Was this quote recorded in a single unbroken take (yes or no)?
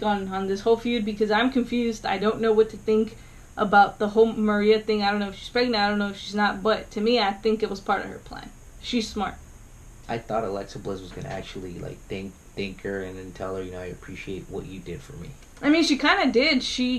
no